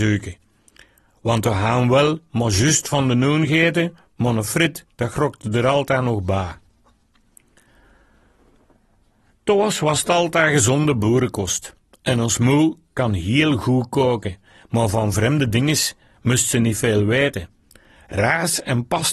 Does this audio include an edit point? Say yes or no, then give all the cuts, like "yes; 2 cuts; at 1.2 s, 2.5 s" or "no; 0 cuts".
no; 0 cuts